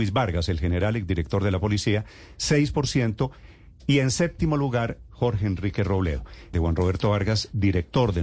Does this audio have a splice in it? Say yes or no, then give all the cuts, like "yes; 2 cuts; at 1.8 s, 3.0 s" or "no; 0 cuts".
yes; 1 cut; at 6.5 s